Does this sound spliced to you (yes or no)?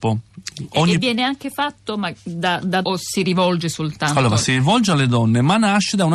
yes